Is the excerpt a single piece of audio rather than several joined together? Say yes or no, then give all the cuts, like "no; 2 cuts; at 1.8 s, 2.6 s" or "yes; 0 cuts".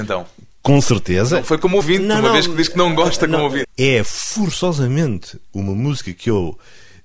no; 1 cut; at 3.6 s